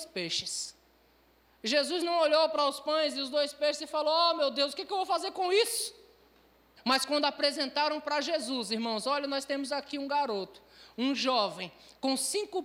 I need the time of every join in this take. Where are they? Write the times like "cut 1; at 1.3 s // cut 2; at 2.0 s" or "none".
cut 1; at 6.8 s